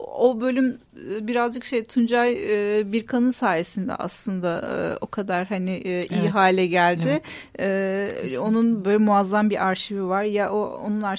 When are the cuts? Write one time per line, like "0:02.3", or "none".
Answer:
none